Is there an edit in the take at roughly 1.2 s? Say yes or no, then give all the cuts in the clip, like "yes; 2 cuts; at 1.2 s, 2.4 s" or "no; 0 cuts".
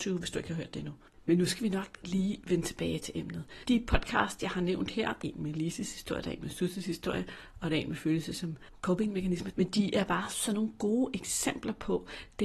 no; 2 cuts; at 5.2 s, 9.5 s